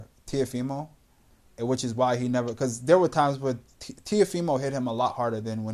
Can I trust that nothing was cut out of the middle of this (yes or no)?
yes